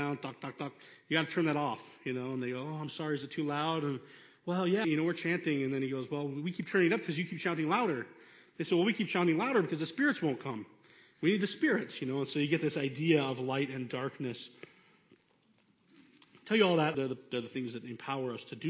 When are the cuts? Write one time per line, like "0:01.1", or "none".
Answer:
0:04.8
0:16.9